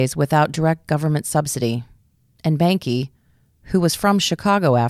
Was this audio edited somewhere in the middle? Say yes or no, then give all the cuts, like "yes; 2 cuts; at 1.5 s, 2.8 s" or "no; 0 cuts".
no; 0 cuts